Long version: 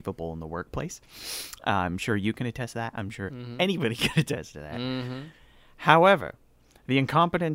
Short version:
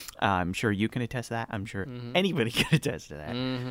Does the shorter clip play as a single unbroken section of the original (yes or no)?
yes